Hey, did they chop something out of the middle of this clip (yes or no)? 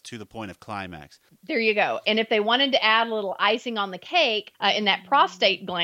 yes